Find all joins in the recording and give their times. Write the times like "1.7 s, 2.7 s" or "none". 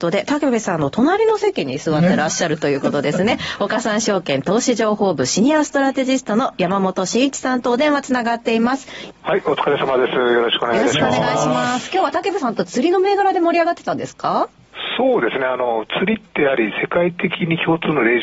9.1 s